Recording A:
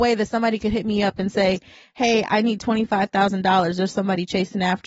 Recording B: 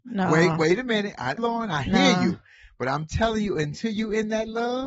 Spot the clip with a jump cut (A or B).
B